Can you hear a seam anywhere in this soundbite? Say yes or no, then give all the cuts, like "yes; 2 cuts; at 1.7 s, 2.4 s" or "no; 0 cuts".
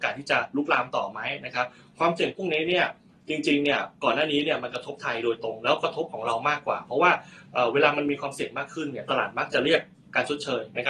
no; 0 cuts